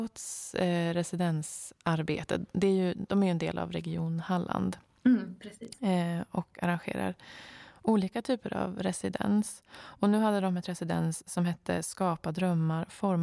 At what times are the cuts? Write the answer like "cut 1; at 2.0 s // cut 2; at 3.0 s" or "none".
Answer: none